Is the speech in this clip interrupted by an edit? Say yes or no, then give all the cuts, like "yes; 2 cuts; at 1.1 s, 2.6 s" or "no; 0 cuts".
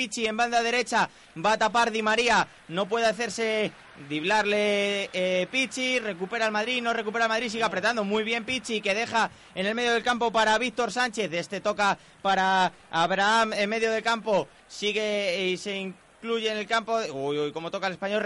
no; 0 cuts